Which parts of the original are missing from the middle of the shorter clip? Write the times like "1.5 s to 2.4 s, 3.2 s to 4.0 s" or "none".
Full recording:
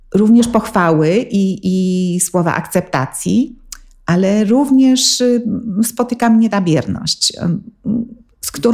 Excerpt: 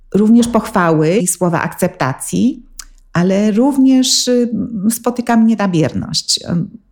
1.2 s to 2.1 s